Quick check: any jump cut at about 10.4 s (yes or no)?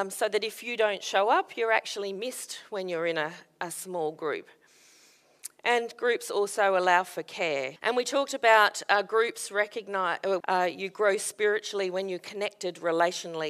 yes